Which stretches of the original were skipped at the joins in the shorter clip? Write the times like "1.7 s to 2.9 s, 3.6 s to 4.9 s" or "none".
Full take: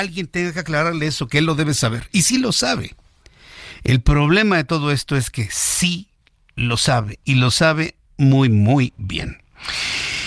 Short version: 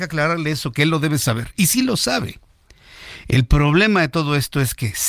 none